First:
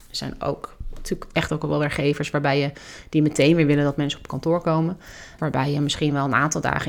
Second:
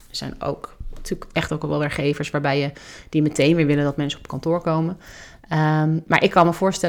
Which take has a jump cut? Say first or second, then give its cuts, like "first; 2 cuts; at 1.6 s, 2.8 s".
first; 1 cut; at 5.4 s